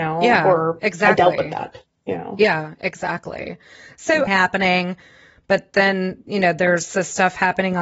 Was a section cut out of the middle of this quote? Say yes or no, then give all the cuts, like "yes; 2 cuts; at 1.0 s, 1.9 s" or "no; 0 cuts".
yes; 1 cut; at 4.3 s